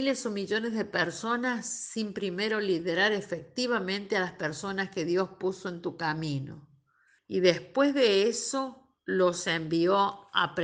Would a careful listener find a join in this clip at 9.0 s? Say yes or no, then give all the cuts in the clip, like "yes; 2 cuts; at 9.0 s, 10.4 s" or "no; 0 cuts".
yes; 2 cuts; at 7.2 s, 9.0 s